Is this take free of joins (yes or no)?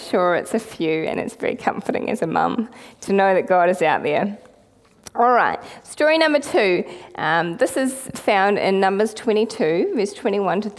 yes